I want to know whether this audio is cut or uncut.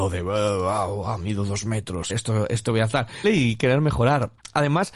cut